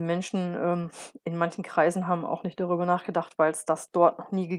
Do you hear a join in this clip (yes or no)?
yes